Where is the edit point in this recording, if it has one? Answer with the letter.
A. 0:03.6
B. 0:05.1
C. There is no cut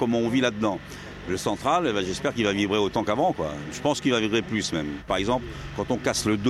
B